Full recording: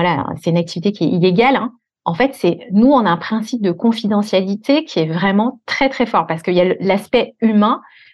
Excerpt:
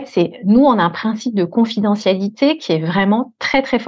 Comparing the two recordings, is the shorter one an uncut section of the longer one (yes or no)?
yes